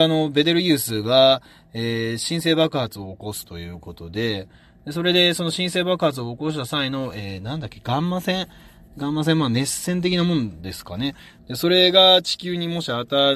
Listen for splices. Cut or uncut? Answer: cut